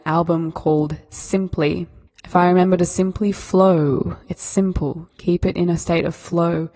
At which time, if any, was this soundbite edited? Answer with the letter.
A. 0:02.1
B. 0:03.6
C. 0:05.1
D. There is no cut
A